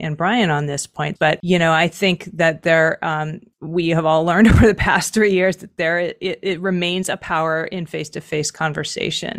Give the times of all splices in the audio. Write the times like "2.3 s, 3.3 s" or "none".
1.1 s